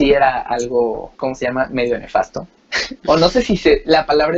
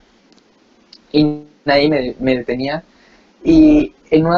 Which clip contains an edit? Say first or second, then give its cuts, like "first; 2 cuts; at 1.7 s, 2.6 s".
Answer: first; 1 cut; at 1.1 s